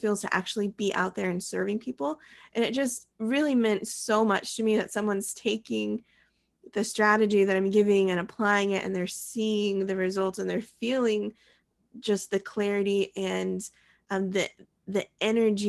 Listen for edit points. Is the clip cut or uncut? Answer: cut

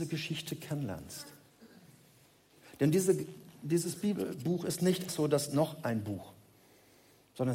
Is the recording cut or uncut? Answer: cut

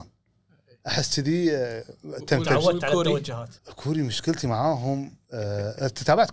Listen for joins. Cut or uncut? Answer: cut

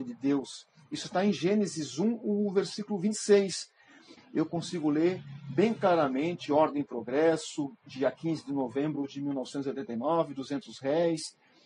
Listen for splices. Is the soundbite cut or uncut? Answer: cut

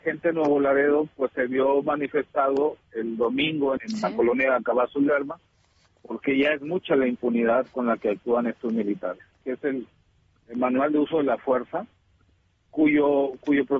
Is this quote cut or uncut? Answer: cut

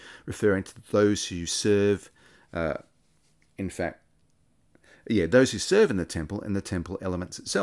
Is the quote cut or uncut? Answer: uncut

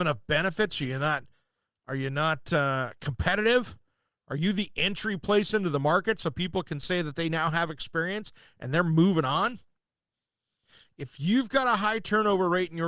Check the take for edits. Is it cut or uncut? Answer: uncut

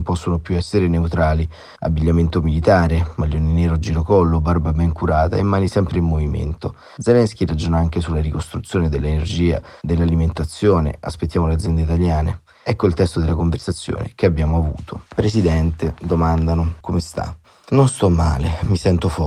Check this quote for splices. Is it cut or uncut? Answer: cut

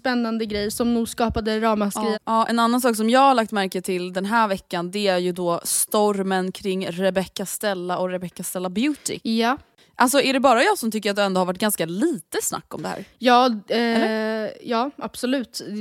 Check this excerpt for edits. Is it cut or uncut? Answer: cut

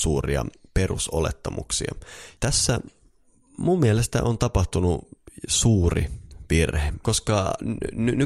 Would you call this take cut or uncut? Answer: cut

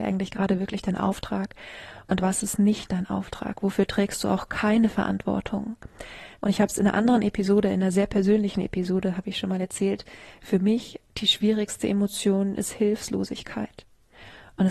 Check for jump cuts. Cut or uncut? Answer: cut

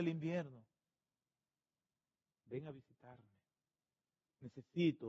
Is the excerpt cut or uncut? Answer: cut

